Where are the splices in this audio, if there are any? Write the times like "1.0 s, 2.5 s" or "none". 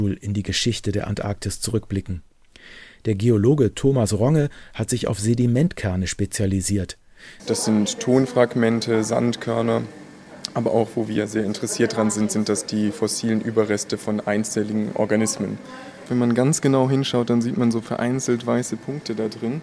7.4 s